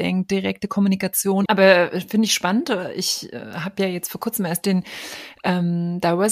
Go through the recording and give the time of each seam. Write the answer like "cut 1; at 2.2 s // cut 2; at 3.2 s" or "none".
cut 1; at 1.4 s